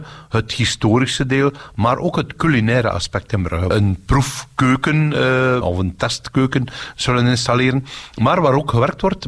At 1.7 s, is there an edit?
no; 2 cuts; at 3.7 s, 5.6 s

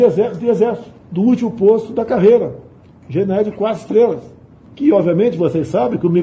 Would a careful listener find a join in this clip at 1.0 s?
yes; 1 cut; at 1.0 s

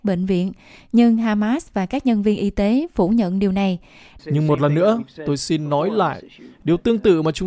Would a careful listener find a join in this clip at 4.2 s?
yes; 1 cut; at 4.2 s

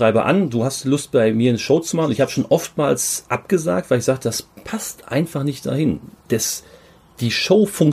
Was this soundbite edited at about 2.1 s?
no; 0 cuts

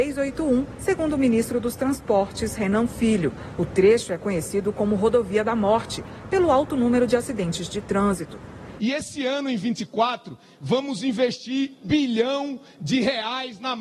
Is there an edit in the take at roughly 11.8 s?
yes; 2 cuts; at 8.8 s, 11.8 s

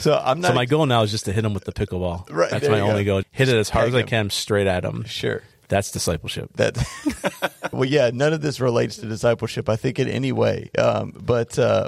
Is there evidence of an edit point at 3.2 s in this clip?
yes; 2 cuts; at 3.2 s, 7.7 s

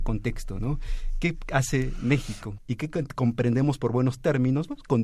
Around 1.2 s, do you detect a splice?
no; 1 cut; at 2.6 s

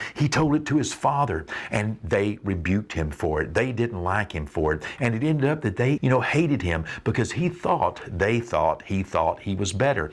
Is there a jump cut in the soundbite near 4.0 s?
no; 1 cut; at 6.0 s

